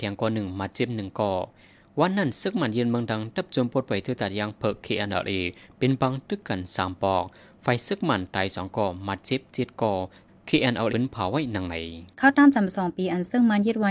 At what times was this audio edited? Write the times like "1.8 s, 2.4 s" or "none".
10.9 s, 12.1 s